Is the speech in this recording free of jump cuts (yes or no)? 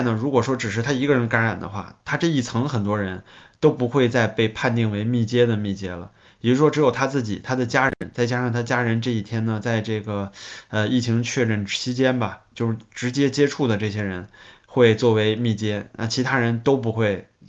yes